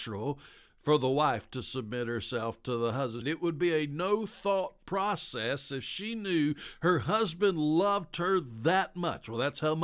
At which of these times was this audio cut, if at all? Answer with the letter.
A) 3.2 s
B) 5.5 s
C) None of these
A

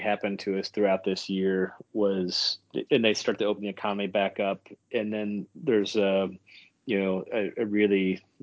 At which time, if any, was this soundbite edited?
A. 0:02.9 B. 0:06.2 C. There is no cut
A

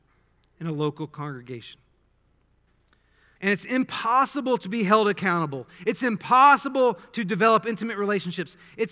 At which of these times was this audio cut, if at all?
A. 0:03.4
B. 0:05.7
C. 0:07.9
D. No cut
A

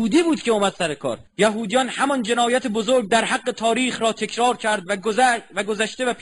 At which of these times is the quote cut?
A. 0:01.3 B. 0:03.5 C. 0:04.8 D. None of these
A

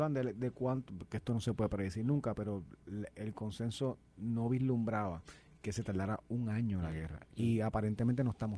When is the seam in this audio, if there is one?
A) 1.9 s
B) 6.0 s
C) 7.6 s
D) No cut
D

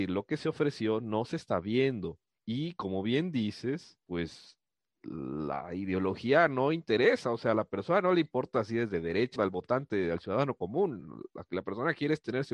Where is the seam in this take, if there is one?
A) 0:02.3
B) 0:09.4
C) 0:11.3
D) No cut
B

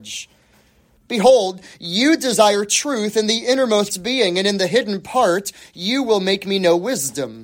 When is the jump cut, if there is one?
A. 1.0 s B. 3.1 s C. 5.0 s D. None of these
A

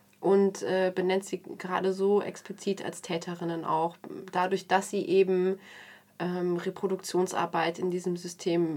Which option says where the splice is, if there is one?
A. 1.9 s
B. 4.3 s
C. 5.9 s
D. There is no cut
D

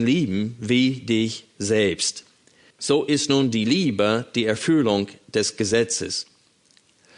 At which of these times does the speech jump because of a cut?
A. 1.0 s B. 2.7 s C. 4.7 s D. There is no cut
B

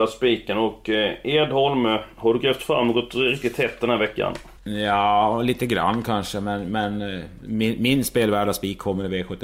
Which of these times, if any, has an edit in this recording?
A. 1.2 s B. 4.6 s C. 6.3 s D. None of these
B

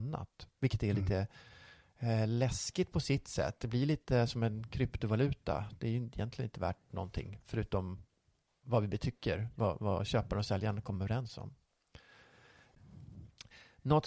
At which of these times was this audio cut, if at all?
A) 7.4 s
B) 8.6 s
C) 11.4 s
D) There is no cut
B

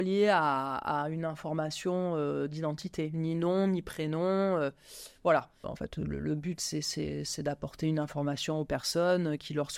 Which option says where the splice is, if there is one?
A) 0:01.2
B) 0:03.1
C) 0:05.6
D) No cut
C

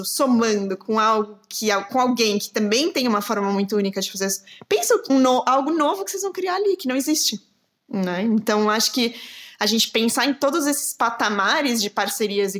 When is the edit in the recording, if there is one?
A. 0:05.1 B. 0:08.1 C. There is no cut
A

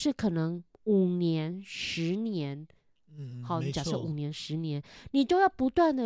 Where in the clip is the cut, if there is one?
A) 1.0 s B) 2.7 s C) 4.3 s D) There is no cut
D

